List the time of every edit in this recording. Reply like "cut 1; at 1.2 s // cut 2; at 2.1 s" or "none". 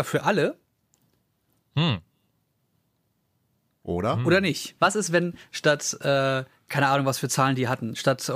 cut 1; at 4.8 s